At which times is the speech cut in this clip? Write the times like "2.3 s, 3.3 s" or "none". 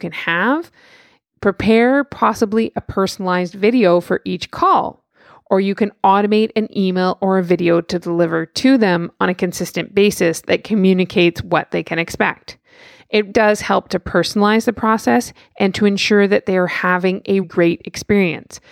13.3 s, 17.4 s